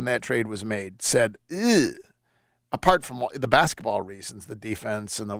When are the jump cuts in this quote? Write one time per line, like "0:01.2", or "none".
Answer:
none